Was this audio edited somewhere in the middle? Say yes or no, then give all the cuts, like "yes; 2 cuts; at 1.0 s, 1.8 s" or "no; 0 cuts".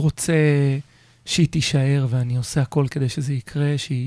no; 0 cuts